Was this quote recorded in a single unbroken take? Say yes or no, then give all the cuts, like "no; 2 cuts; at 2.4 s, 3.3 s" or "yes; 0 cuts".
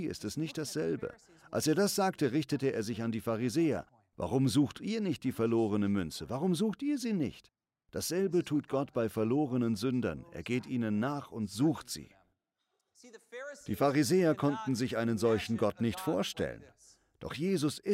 yes; 0 cuts